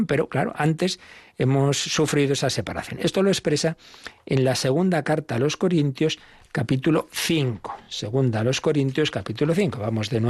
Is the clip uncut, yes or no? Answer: yes